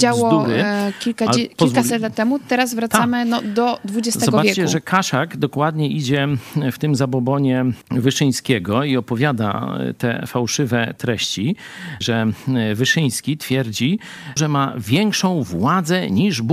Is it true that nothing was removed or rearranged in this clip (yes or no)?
no